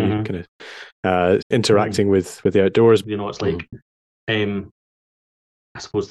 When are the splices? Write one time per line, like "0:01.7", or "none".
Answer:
0:01.4
0:03.0

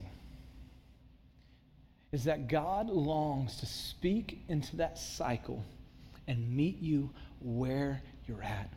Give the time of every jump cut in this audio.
none

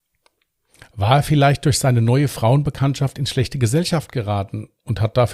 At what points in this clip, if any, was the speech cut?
none

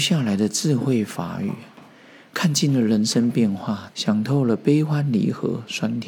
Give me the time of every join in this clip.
0:03.9

